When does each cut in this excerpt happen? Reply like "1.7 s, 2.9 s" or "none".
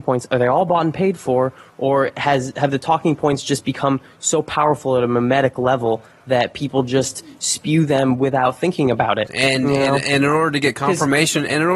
9.3 s